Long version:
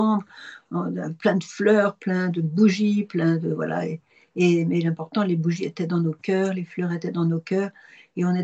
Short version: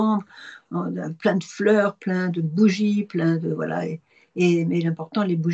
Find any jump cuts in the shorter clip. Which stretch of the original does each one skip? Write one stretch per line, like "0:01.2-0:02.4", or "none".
none